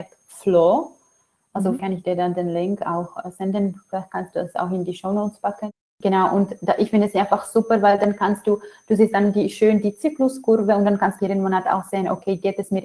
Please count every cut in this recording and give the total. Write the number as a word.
one